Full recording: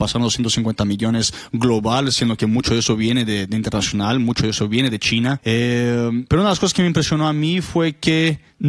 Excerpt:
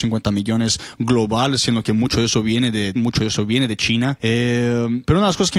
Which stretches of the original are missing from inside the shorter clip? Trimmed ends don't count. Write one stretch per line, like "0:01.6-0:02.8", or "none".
0:03.5-0:04.2